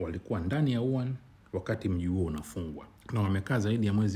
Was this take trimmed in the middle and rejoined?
yes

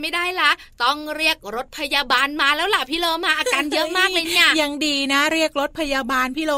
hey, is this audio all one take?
yes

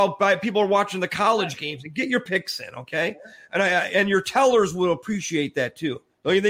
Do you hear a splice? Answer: no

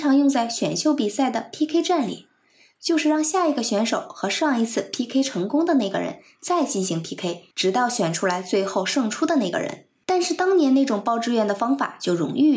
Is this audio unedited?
no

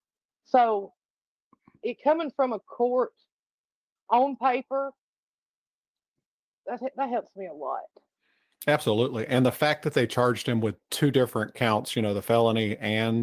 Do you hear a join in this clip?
no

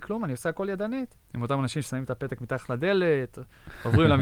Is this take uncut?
yes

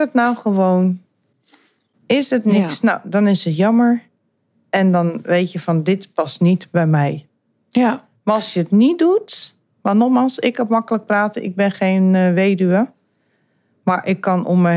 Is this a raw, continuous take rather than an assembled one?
yes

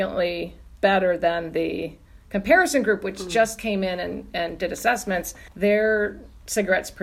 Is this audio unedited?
yes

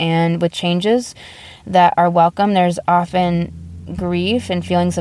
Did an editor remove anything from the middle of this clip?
no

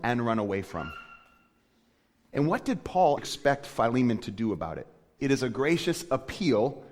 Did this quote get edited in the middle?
yes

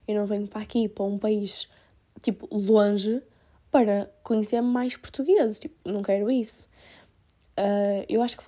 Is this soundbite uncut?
yes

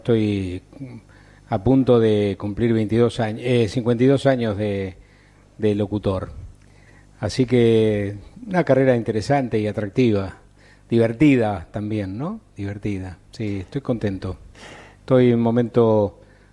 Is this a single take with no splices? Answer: yes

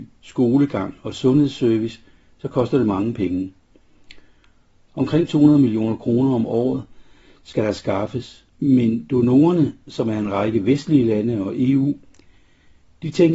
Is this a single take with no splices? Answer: no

